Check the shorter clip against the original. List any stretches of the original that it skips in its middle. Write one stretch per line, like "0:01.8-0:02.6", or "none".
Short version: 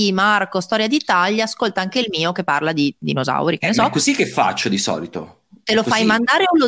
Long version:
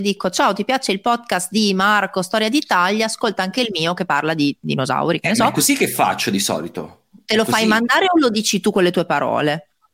none